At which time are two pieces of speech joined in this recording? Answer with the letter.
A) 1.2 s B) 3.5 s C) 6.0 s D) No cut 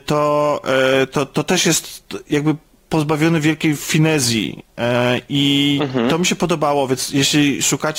D